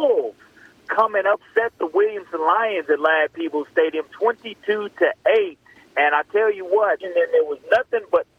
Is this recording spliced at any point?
yes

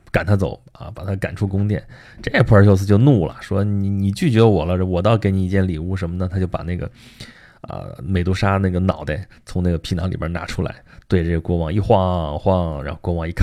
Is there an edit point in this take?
no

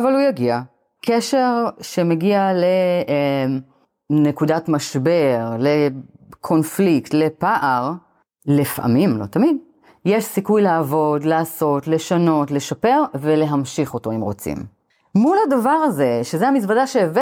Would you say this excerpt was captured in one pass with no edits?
no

